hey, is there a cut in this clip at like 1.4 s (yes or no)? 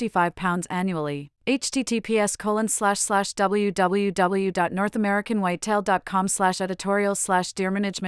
no